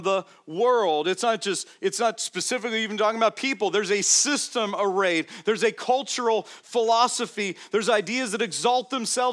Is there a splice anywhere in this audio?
no; 0 cuts

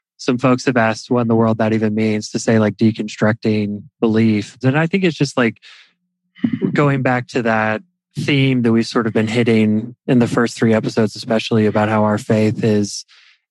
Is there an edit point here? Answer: yes; 1 cut; at 4.6 s

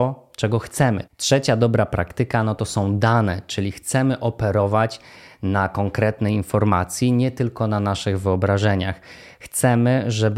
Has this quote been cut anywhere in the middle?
yes; 1 cut; at 1.0 s

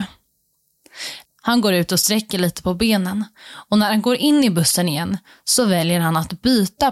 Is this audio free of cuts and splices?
no; 1 cut; at 1.2 s

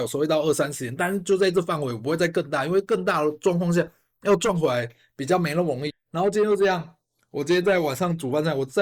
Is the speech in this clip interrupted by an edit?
yes; 1 cut; at 5.9 s

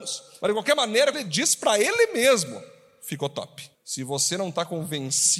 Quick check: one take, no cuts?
no; 2 cuts; at 1.1 s, 3.7 s

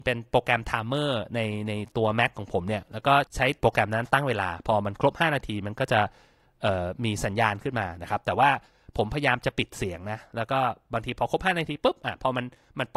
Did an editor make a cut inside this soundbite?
no; 0 cuts

